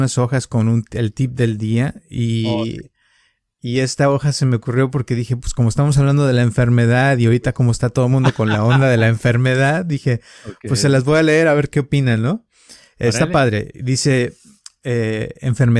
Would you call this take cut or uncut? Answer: uncut